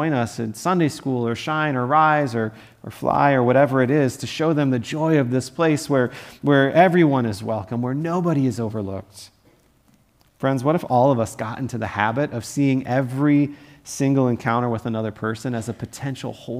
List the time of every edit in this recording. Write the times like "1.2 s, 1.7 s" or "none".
none